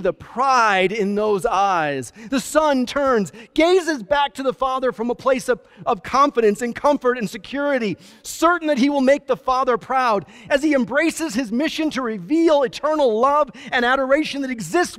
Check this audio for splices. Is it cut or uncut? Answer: uncut